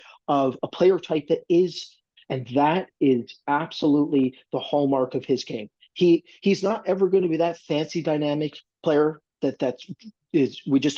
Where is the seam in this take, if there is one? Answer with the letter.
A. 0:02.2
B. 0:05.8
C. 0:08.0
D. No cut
A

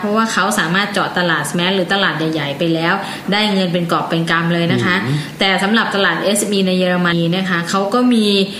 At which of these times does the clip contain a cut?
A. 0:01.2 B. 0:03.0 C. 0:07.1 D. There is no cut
C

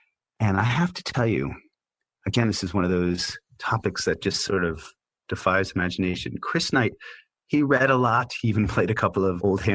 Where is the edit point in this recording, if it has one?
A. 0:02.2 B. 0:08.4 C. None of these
C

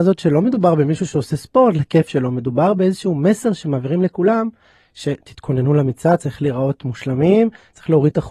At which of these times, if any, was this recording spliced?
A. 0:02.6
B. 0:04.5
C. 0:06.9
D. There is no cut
D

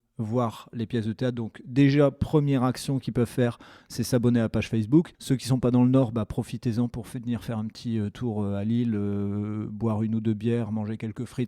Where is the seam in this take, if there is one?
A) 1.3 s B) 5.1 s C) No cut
B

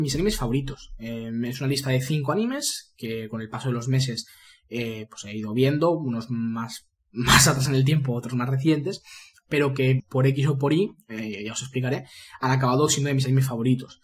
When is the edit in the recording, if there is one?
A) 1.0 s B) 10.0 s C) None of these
B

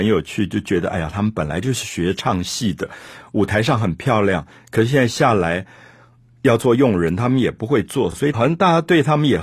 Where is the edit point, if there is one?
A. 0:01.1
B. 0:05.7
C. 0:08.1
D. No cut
D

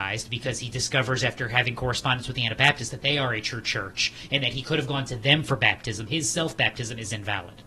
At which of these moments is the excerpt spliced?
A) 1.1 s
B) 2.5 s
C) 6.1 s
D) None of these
C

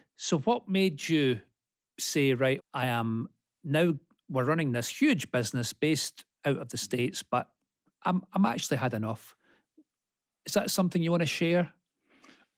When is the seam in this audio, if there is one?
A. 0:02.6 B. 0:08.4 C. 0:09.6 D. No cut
A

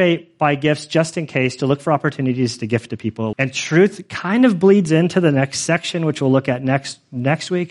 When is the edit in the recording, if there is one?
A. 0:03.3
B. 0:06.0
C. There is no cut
A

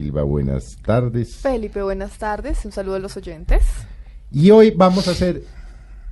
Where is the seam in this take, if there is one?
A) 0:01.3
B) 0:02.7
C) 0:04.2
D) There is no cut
D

